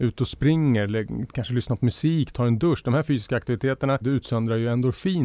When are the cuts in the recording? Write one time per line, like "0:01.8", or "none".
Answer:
0:04.0